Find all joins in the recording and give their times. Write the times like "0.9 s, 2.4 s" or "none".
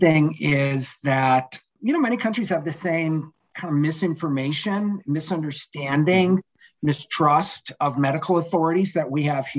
none